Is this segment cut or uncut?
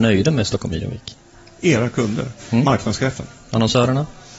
uncut